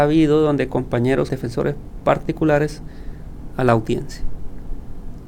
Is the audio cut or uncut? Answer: cut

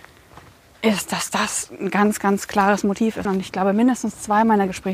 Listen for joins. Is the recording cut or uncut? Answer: cut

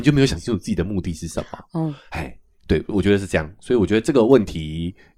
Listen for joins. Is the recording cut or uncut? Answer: uncut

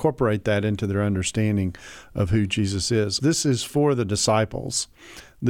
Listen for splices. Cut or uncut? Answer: cut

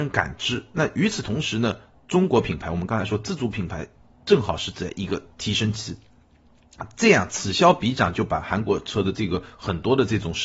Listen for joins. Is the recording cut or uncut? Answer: uncut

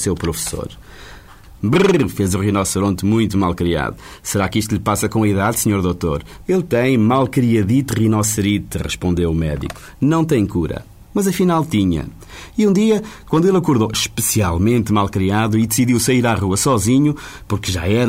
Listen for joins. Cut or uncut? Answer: cut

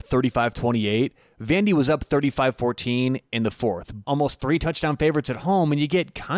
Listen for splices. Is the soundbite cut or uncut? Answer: cut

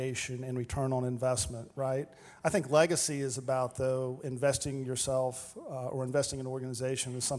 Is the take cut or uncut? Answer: uncut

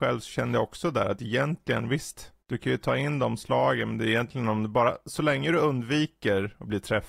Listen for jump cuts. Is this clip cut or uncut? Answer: cut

